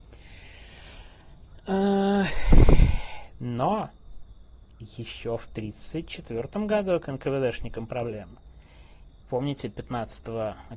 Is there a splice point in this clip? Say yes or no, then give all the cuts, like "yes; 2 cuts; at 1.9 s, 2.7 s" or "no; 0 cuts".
yes; 1 cut; at 9.2 s